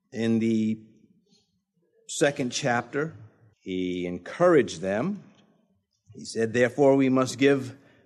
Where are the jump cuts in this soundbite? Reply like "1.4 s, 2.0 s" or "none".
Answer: 3.5 s